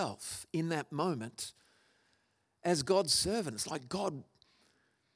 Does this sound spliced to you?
no; 0 cuts

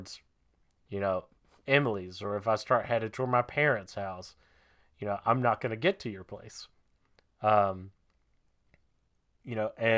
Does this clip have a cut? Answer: no; 0 cuts

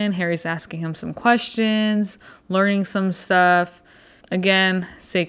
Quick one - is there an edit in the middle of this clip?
yes; 1 cut; at 4.2 s

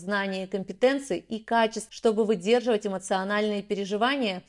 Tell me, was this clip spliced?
yes; 1 cut; at 1.9 s

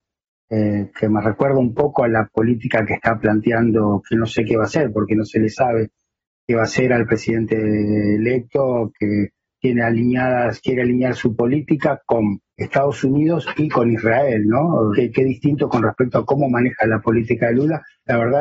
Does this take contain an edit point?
yes; 2 cuts; at 12.5 s, 14.9 s

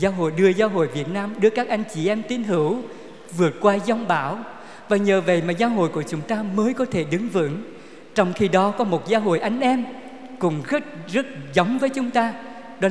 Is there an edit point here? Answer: no; 0 cuts

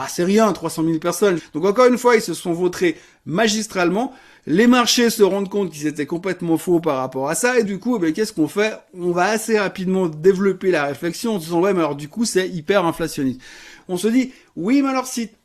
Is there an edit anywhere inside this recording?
yes; 3 cuts; at 1.4 s, 7.7 s, 13.8 s

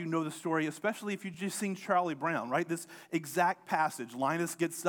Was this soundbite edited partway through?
no; 0 cuts

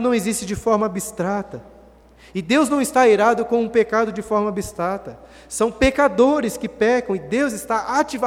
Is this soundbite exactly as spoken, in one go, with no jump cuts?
yes; 0 cuts

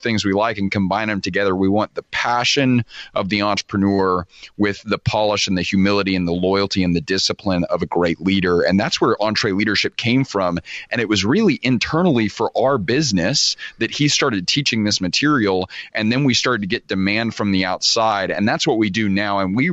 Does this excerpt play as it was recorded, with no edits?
yes; 0 cuts

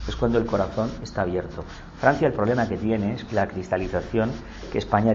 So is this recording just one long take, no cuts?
yes; 0 cuts

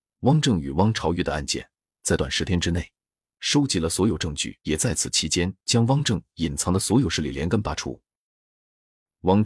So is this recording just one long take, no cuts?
no; 2 cuts; at 2.2 s, 4.6 s

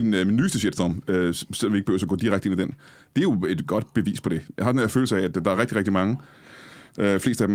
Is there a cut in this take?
no; 0 cuts

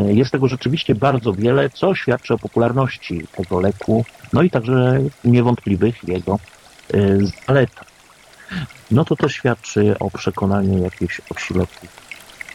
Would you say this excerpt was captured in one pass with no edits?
no; 2 cuts; at 8.7 s, 10.0 s

